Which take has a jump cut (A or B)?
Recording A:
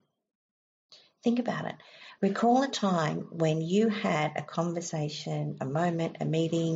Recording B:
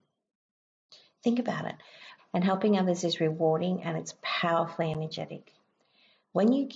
B